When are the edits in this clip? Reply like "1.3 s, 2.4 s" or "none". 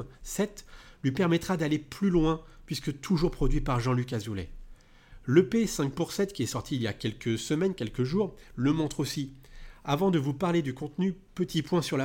none